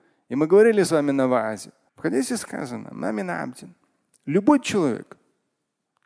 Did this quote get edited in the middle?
yes; 1 cut; at 1.9 s

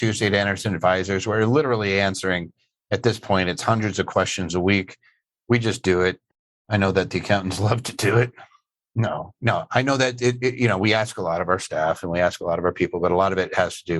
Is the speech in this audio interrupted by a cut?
no; 0 cuts

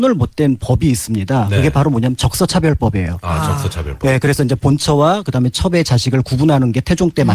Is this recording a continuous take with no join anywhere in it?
yes; 0 cuts

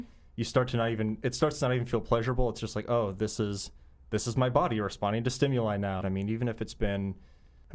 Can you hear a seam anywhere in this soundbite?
yes; 1 cut; at 6.0 s

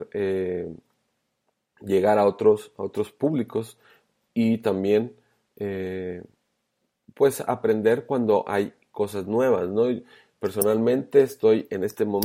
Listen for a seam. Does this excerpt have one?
no; 0 cuts

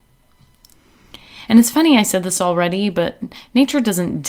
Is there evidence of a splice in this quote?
no; 0 cuts

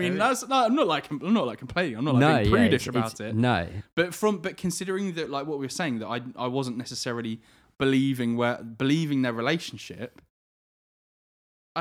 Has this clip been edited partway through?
no; 0 cuts

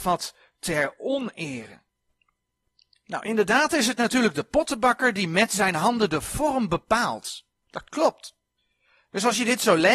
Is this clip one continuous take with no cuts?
yes; 0 cuts

